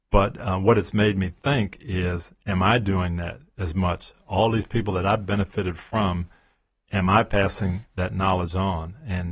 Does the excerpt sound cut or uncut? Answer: uncut